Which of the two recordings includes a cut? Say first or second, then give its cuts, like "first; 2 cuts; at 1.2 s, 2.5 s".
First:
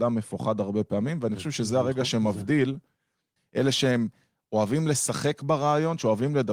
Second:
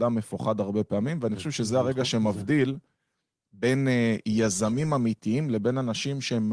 first; 1 cut; at 3.4 s